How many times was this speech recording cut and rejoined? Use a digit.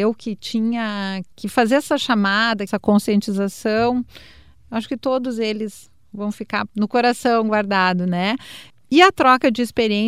0